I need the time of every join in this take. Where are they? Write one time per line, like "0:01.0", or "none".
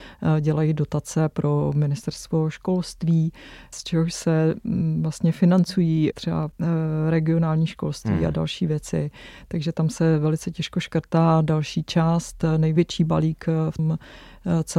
0:13.8